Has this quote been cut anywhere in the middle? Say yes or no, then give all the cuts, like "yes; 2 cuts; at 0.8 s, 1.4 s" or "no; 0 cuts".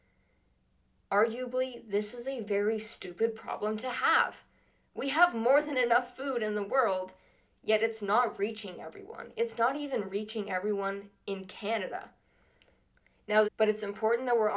yes; 1 cut; at 13.4 s